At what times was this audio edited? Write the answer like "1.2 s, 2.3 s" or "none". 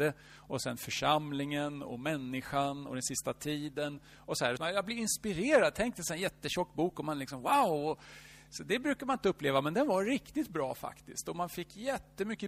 4.6 s